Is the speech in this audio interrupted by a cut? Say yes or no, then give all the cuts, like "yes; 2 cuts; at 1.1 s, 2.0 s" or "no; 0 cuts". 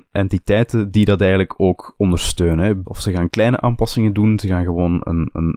yes; 1 cut; at 2.8 s